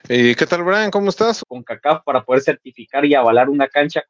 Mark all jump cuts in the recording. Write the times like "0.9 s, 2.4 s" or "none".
1.4 s